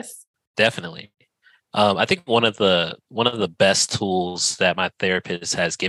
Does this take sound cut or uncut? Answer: uncut